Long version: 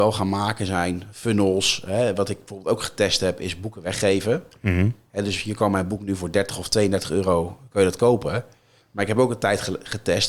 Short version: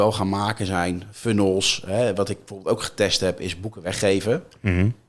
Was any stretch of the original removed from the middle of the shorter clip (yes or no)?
no